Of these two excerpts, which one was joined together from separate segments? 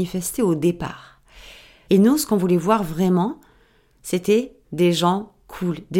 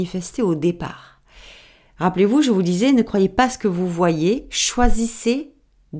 first; 1 cut; at 1.8 s

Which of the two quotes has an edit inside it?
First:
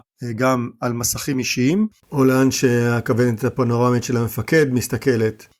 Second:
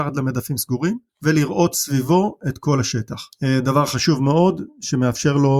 first; 1 cut; at 1.9 s

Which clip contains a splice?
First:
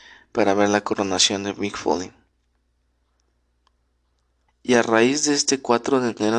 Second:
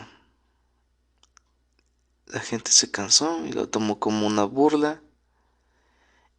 first; 1 cut; at 4.5 s

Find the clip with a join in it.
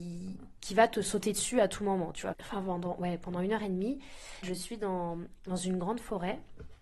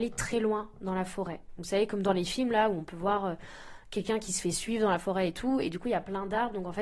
first; 2 cuts; at 2.3 s, 4.4 s

